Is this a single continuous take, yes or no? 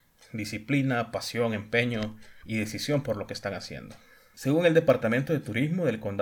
no